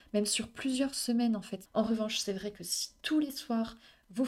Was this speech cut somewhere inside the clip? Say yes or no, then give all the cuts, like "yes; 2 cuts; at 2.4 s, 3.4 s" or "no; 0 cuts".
yes; 1 cut; at 1.7 s